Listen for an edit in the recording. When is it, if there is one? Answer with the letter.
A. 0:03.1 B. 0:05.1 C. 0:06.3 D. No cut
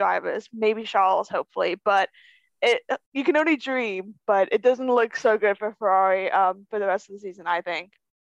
A